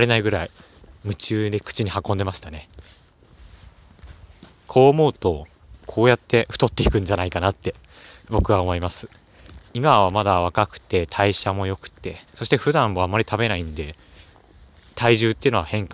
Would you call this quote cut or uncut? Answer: cut